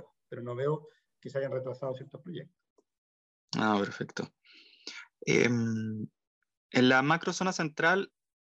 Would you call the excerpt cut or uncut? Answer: uncut